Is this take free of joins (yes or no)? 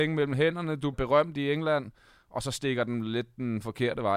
no